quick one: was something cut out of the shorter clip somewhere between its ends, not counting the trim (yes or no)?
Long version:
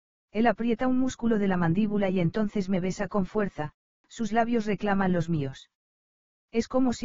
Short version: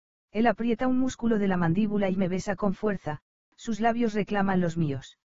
yes